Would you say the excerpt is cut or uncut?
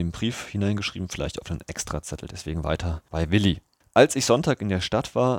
cut